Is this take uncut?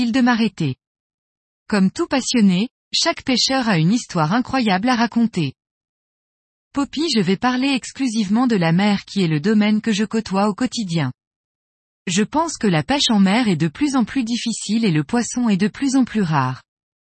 yes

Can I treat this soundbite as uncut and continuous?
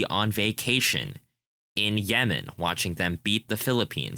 yes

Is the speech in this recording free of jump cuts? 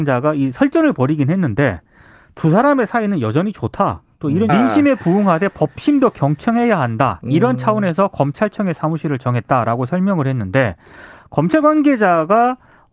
no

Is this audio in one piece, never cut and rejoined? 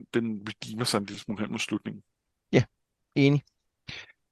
yes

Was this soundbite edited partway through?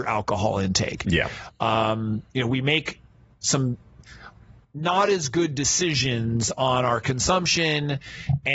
no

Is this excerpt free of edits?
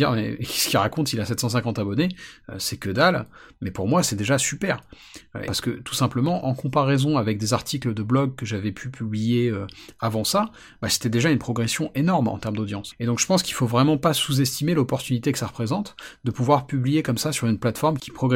no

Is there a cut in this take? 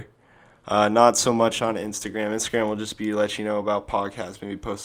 no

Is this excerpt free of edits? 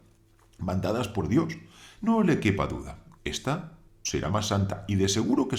no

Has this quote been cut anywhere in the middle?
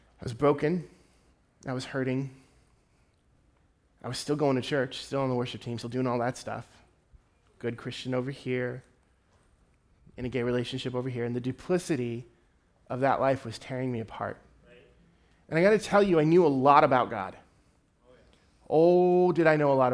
yes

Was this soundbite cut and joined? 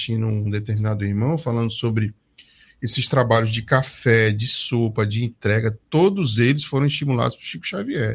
no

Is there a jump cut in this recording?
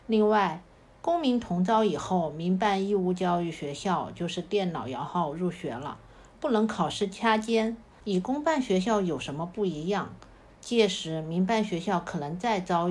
yes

